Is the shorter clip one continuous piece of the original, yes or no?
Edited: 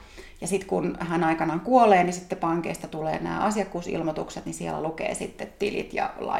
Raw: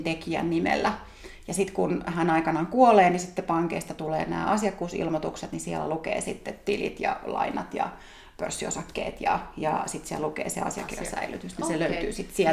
yes